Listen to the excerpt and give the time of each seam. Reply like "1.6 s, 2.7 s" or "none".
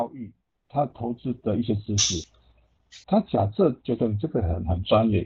3.0 s